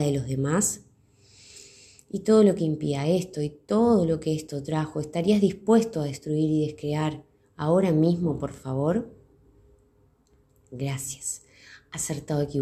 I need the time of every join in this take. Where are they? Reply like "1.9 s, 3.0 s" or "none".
none